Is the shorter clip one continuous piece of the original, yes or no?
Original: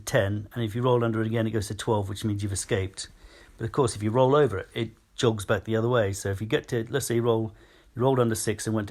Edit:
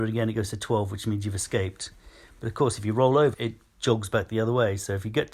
no